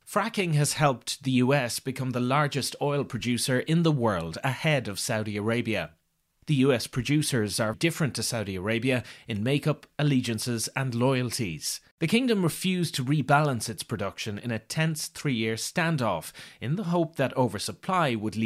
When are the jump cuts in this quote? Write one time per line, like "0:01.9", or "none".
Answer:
0:07.7
0:11.9